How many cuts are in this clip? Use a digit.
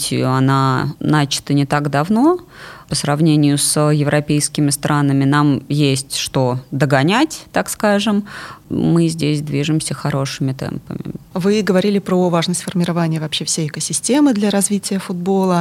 1